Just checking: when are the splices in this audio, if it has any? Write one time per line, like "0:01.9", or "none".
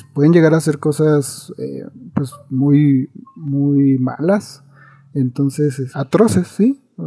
0:05.9